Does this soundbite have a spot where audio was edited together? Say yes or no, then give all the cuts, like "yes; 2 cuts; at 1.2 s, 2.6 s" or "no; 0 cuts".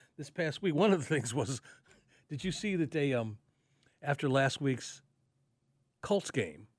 no; 0 cuts